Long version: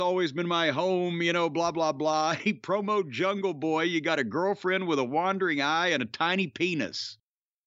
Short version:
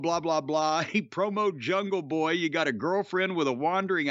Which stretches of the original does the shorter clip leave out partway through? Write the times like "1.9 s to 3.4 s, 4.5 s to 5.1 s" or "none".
none